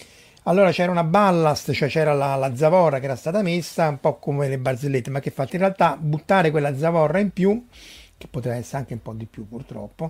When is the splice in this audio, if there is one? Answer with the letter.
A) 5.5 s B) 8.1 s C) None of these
A